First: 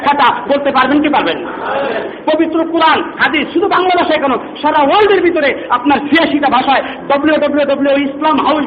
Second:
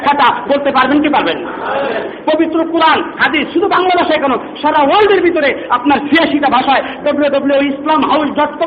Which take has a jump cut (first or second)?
second